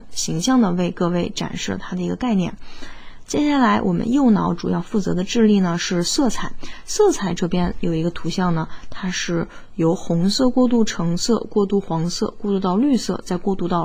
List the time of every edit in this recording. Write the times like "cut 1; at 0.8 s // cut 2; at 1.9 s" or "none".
none

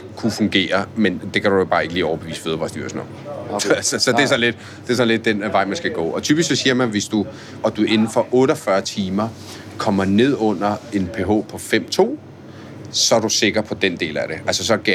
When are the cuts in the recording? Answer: cut 1; at 7.6 s

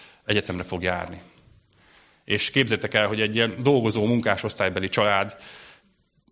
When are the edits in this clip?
none

